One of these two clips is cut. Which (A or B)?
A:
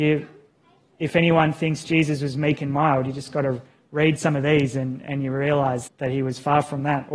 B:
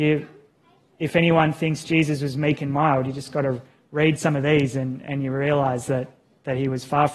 A